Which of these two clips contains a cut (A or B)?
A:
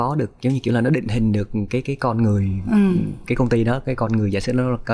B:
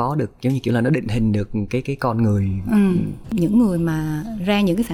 B